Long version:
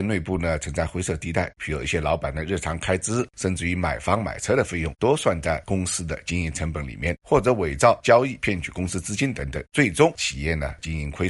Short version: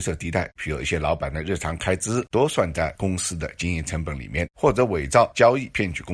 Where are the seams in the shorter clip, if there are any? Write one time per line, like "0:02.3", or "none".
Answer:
0:02.3